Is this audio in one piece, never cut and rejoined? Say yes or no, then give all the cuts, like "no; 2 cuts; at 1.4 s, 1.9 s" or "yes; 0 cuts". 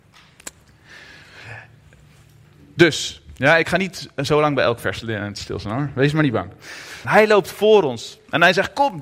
no; 1 cut; at 7.0 s